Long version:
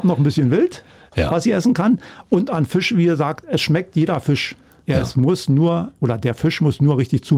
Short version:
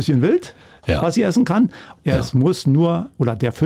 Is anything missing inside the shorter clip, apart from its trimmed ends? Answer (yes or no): yes